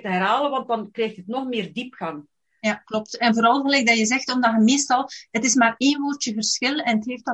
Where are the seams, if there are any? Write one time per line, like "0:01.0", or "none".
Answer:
none